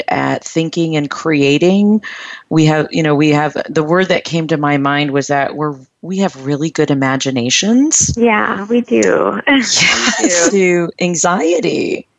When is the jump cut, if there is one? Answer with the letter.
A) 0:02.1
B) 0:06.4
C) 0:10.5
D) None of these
C